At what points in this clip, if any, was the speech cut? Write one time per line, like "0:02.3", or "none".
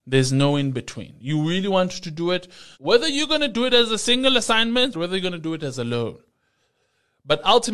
0:02.7
0:04.9